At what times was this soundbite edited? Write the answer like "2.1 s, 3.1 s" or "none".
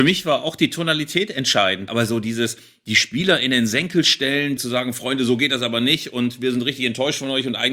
1.9 s, 4.6 s